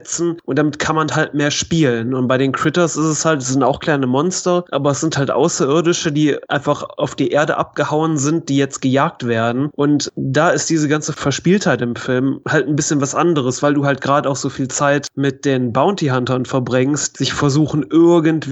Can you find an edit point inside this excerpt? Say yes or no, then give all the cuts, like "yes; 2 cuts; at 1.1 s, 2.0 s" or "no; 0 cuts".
yes; 1 cut; at 17.1 s